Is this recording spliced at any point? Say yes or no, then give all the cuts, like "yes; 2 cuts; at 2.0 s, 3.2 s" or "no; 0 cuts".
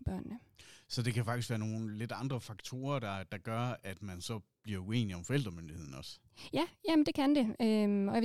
no; 0 cuts